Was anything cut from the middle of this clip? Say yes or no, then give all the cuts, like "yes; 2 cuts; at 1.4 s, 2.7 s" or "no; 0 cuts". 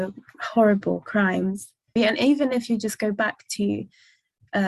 yes; 1 cut; at 2.0 s